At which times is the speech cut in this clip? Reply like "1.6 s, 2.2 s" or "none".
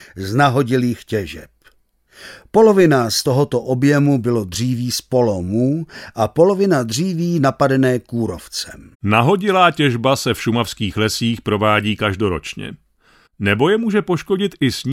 8.9 s, 13.3 s